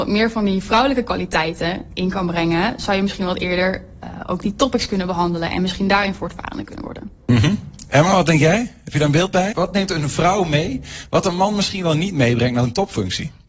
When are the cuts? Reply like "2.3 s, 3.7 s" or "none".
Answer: 9.5 s